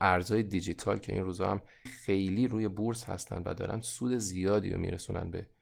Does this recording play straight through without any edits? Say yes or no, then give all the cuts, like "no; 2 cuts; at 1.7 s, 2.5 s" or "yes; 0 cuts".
no; 1 cut; at 1.9 s